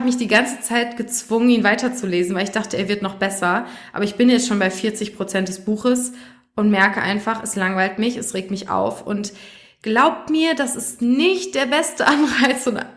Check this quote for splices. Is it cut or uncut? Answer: uncut